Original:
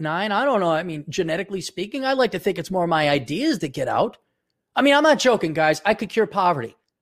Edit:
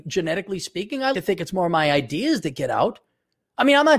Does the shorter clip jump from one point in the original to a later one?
yes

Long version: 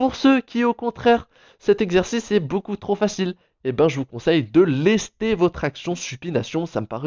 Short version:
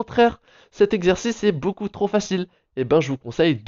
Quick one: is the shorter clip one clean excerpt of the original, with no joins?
yes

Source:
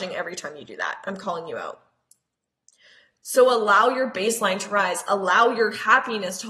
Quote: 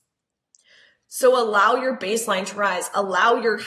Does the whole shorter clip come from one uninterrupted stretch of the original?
yes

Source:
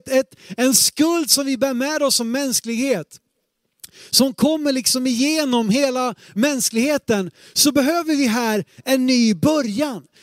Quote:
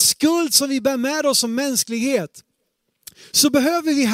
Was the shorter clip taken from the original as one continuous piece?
no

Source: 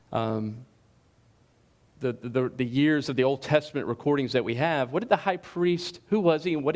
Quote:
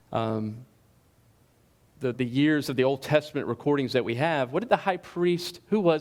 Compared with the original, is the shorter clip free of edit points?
no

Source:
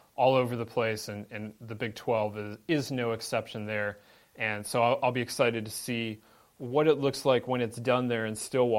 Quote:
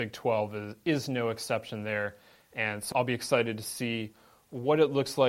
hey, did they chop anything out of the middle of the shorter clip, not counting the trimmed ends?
yes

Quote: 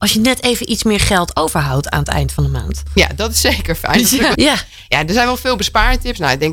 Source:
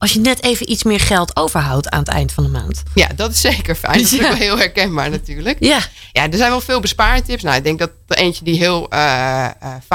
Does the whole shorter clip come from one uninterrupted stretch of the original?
no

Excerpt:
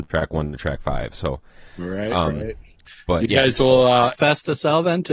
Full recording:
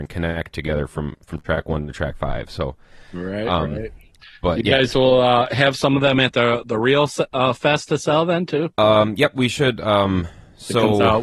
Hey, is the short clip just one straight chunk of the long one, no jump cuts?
no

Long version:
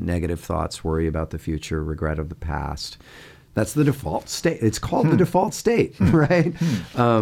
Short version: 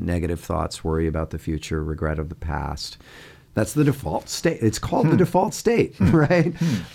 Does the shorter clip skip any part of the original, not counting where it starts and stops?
no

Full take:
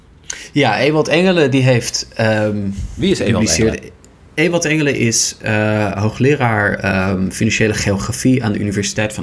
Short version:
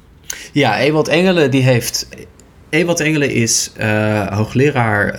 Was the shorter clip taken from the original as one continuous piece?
no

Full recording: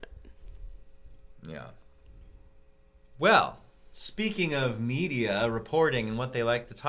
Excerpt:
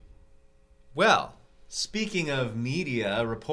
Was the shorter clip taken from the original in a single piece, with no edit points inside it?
yes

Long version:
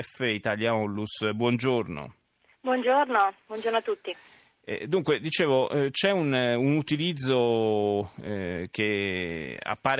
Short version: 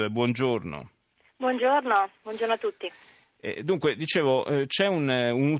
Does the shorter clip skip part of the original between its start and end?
no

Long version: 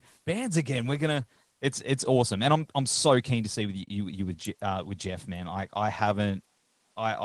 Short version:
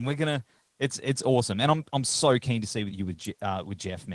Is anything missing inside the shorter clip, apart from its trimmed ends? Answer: yes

